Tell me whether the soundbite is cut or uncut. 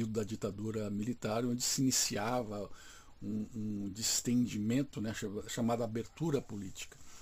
uncut